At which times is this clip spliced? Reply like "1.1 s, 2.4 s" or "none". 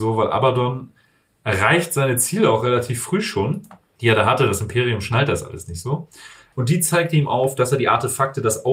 6.5 s